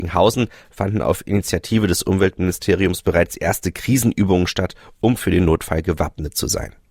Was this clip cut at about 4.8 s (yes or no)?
no